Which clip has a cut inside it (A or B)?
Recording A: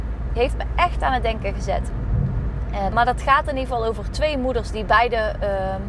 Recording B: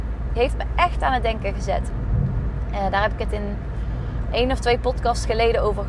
A